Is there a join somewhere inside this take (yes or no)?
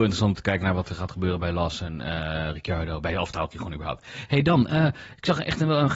no